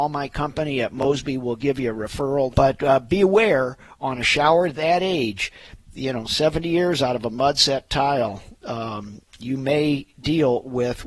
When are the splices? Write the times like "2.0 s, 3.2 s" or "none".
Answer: 2.5 s